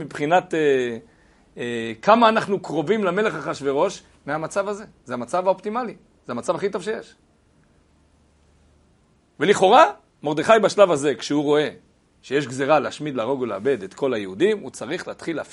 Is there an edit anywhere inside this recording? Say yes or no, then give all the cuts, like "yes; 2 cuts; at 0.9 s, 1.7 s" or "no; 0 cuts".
no; 0 cuts